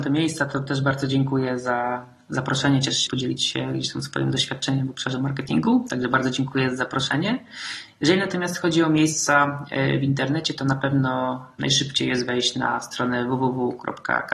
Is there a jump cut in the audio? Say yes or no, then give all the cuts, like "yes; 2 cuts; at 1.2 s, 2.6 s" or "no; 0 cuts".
yes; 1 cut; at 3.1 s